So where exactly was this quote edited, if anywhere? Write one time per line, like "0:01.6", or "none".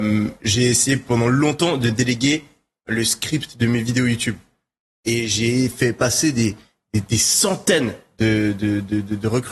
none

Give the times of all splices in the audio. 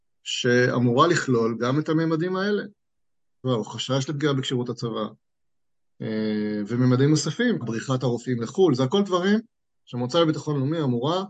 0:03.4
0:07.6

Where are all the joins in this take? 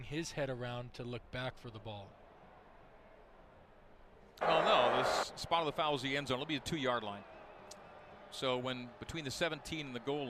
0:04.4

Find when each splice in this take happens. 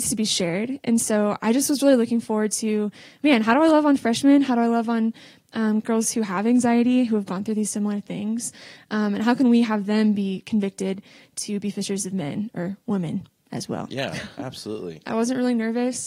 0:05.8
0:15.0

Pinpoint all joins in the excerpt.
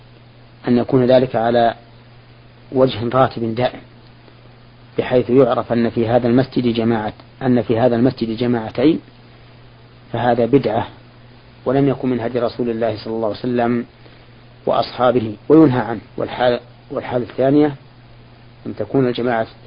0:16.1

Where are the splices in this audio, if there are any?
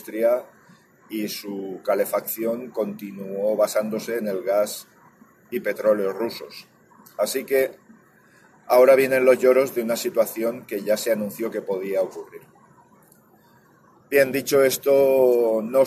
none

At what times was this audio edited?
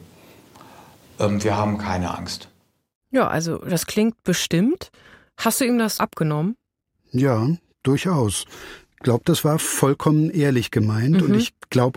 0:06.0

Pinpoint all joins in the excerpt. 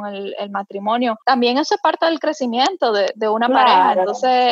0:01.2

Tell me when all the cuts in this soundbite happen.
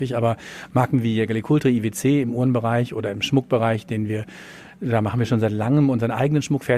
none

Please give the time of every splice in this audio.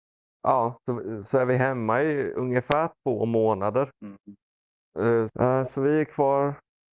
0:03.9
0:05.3

